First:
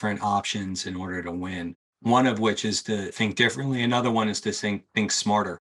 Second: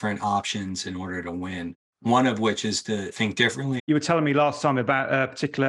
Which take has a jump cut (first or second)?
second